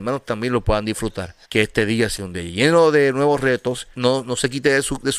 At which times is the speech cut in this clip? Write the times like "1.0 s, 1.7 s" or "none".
1.4 s, 3.9 s